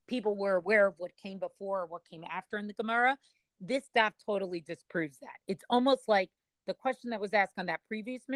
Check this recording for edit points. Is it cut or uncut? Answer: uncut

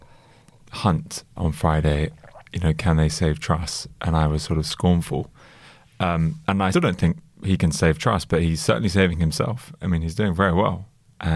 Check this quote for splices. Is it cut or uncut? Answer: cut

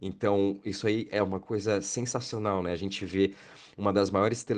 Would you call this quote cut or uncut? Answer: uncut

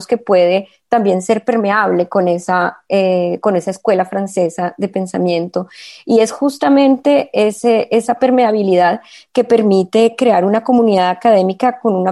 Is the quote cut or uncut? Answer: uncut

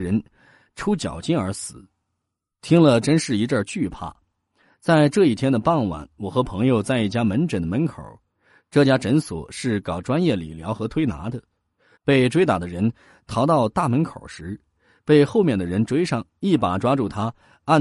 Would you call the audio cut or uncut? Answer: cut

